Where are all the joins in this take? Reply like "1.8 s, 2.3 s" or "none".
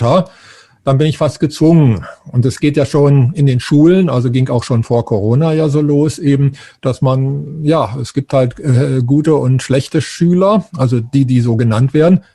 none